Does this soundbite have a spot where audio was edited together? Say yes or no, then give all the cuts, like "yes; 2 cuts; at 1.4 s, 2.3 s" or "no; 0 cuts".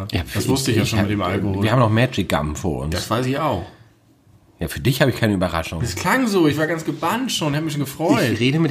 no; 0 cuts